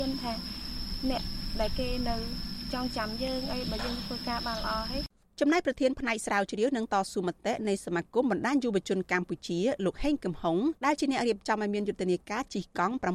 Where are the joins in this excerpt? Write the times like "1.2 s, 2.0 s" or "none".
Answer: 10.8 s